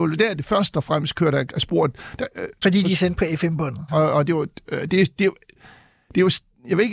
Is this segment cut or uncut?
cut